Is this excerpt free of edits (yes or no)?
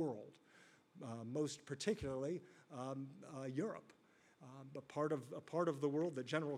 yes